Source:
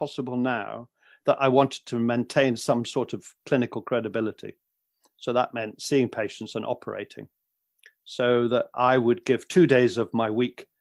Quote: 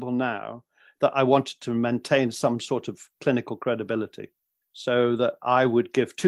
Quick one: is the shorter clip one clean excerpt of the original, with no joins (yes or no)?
no